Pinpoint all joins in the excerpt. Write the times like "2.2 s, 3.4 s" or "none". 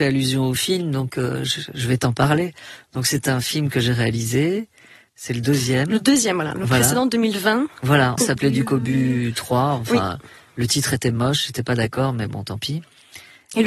8.2 s